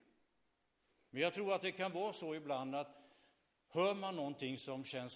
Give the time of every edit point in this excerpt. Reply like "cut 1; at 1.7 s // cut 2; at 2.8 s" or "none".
cut 1; at 1.0 s